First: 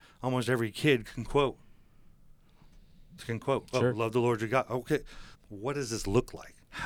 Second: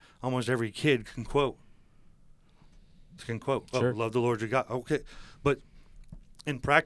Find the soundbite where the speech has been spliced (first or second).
first